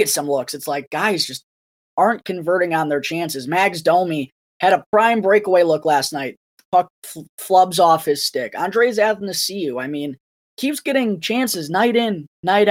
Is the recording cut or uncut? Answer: uncut